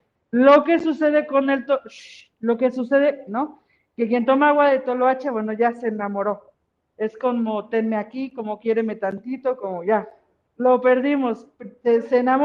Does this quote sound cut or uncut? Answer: cut